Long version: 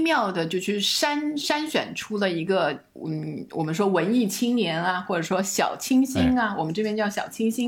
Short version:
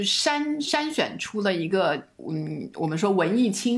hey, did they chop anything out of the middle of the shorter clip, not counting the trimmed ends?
no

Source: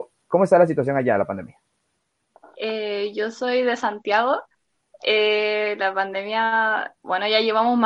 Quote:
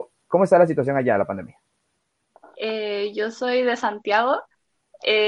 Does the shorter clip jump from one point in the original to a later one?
no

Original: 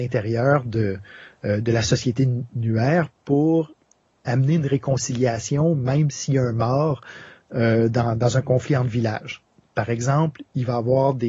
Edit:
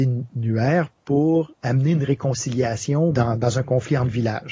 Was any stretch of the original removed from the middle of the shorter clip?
yes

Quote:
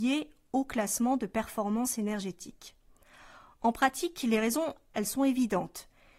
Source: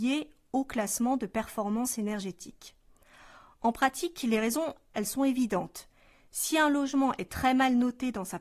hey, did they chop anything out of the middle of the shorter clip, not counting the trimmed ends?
no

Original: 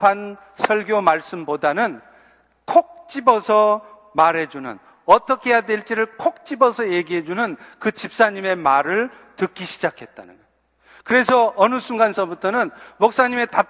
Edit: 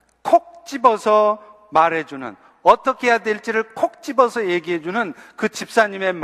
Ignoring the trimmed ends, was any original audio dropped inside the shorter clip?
no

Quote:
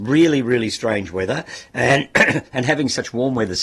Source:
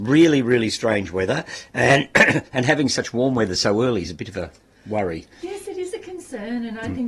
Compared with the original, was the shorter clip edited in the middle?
no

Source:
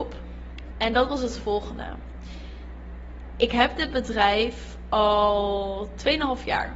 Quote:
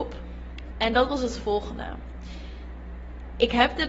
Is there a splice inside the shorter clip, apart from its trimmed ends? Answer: no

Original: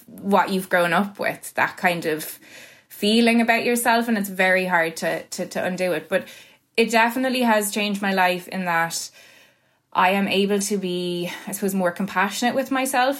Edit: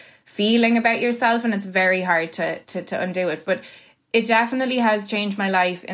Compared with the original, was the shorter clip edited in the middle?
no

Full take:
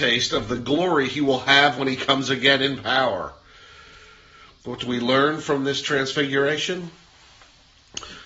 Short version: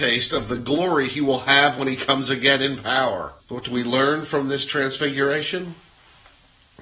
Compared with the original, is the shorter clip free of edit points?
no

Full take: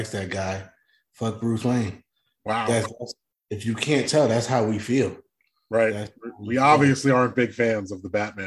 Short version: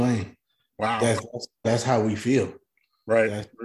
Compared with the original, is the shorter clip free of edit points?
no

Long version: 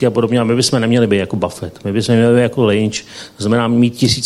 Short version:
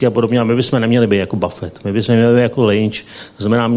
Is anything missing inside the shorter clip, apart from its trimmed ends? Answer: no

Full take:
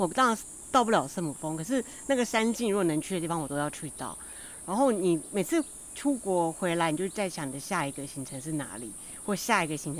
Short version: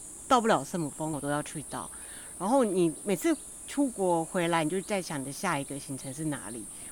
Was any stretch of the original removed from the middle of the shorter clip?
yes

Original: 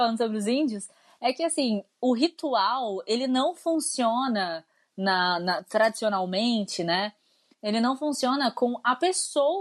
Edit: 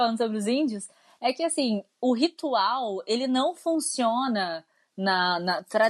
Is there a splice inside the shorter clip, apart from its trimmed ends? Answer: no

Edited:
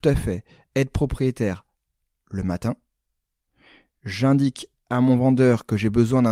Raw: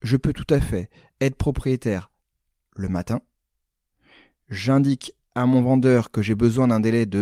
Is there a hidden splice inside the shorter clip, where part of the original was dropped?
no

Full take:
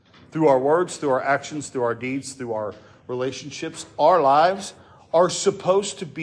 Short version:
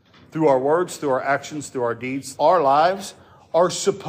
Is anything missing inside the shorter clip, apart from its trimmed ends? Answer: yes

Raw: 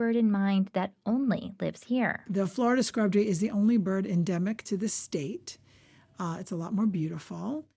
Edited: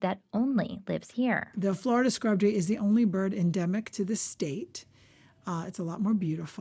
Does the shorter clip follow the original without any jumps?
yes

